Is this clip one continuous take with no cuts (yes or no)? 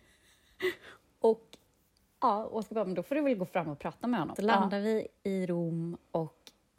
no